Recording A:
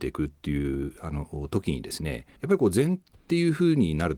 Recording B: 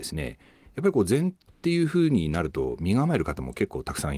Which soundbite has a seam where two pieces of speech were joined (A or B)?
A